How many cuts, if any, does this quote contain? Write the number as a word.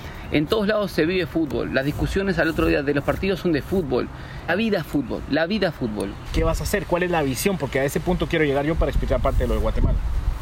two